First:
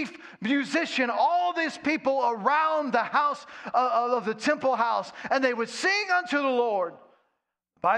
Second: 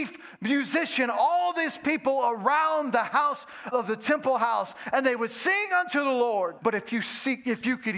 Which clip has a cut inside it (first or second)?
second